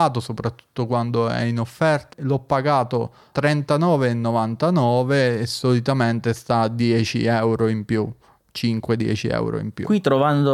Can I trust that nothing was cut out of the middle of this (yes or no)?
no